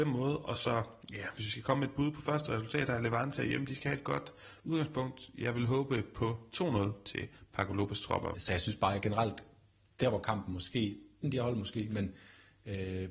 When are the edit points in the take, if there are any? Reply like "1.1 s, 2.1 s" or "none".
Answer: 8.3 s, 11.2 s